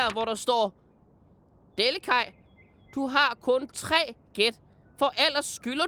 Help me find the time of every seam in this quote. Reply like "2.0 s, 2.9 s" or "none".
none